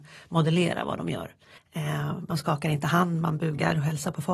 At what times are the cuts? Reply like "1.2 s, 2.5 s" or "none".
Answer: 1.6 s